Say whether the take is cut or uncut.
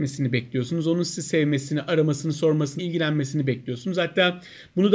cut